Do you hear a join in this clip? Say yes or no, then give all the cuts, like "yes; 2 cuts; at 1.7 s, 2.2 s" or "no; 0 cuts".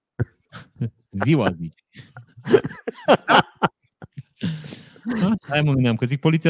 no; 0 cuts